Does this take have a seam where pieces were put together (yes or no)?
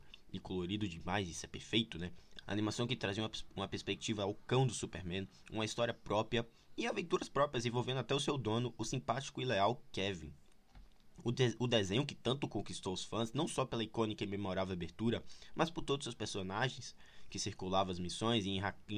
yes